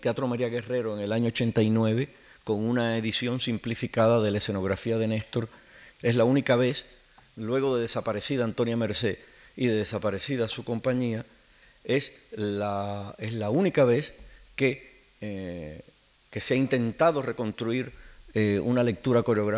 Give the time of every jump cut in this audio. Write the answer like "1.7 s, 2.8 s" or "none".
5.9 s